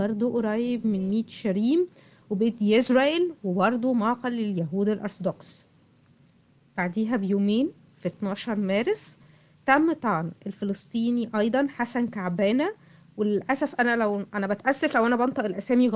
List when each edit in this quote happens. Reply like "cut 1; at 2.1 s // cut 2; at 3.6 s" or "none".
none